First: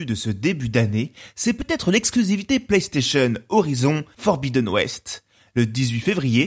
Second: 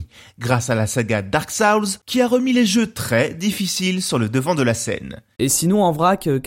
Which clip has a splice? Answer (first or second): second